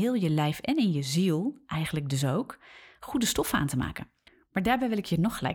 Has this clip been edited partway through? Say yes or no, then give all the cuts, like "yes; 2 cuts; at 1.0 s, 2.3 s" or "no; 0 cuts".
no; 0 cuts